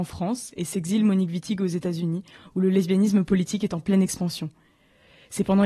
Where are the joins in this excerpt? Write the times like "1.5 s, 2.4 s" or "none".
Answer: none